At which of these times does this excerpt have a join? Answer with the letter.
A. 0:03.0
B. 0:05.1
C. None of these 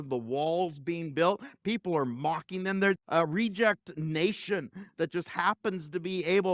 A